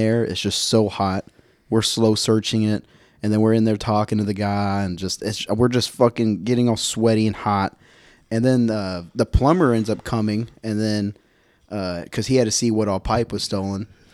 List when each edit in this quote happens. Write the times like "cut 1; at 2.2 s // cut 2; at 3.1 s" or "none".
none